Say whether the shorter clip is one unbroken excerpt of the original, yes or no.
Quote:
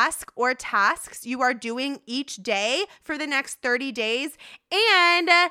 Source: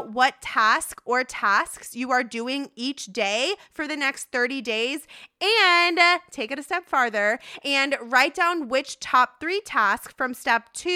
yes